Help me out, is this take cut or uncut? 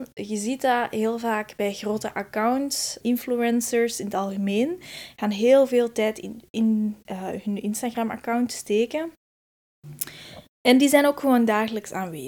cut